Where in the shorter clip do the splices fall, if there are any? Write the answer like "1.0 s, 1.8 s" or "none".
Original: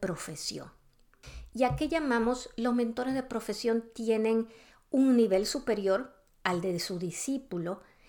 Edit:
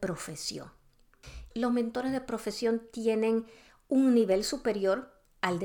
1.5 s

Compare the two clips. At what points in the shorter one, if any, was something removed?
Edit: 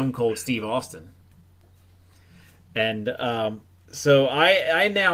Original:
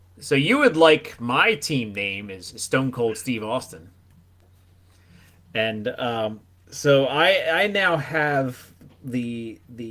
none

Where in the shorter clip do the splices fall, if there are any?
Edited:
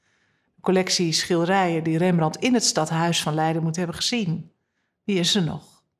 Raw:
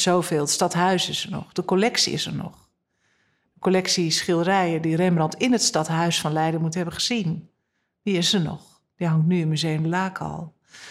none

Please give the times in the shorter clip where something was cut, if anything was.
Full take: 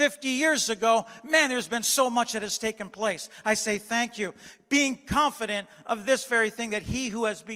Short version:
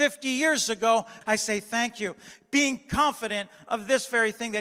1.2 s

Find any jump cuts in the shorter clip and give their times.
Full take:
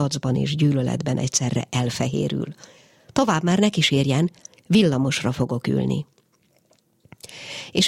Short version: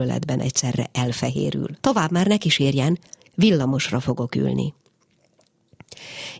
1.8 s

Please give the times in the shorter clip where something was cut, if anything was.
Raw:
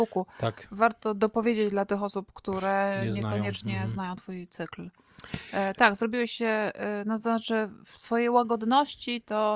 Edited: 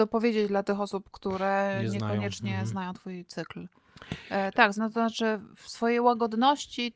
4.7 s

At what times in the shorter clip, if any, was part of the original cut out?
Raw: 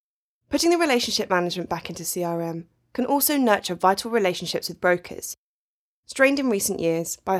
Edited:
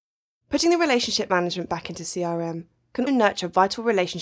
3.1 s

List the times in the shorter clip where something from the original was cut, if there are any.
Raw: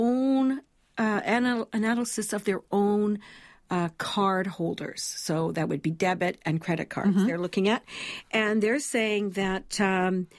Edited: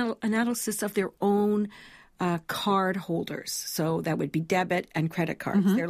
none

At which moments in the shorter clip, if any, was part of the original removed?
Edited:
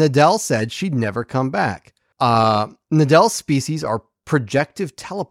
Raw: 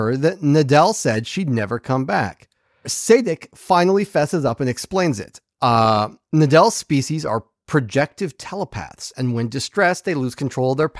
2.1 s

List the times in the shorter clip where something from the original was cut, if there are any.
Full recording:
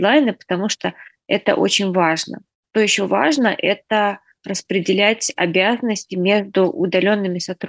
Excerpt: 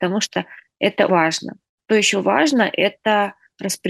1.1 s

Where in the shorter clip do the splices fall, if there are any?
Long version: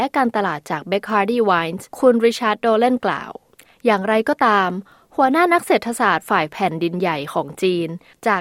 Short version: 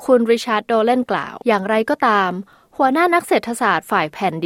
1.4 s

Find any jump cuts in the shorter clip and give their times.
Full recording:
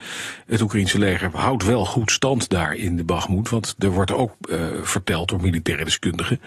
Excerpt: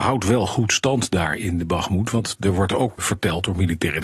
3.0 s

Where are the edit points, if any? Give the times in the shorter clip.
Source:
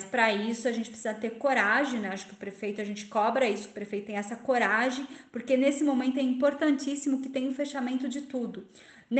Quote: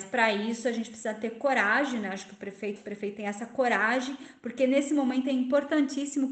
2.8 s

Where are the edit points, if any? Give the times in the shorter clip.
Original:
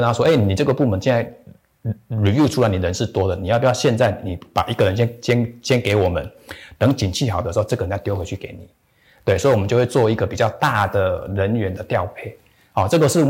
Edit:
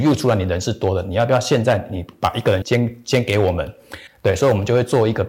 2.6 s, 4.1 s

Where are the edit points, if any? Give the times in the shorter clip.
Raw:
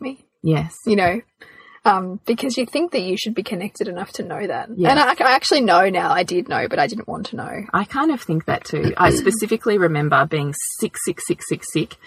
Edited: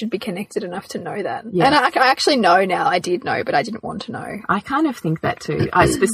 none

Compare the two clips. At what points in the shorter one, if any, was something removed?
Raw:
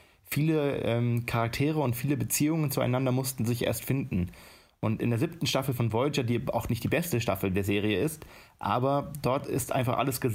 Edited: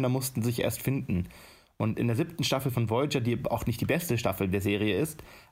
none

